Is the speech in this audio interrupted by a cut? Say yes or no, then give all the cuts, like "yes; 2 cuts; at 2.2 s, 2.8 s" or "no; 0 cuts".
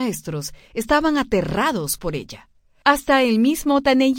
no; 0 cuts